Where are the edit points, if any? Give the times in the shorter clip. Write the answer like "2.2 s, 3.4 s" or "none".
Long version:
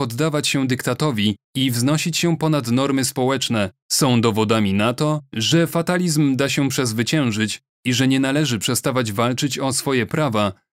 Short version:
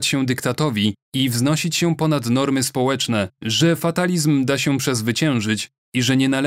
3.4 s

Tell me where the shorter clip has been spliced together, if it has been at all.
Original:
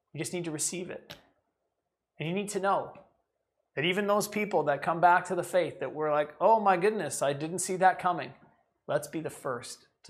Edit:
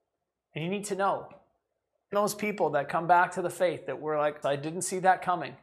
2.1 s, 4.4 s

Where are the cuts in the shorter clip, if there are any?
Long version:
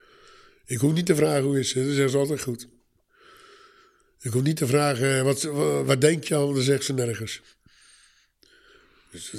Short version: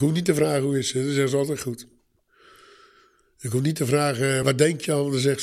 4.4 s

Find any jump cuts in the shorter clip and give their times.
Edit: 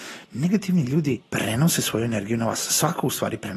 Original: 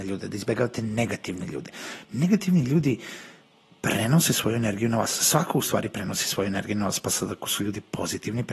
1.2 s

